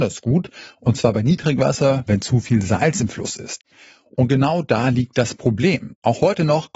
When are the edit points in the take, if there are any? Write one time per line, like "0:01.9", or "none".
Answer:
0:02.1